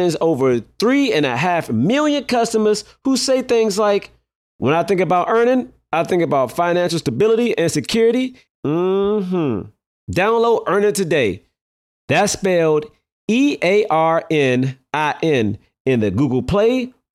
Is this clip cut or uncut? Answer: cut